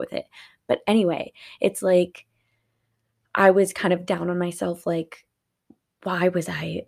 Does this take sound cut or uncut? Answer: uncut